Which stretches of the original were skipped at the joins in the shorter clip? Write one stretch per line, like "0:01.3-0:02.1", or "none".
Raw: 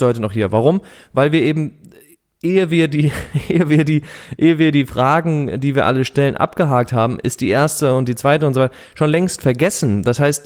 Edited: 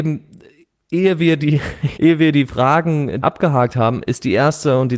0:03.5-0:04.4
0:05.6-0:06.4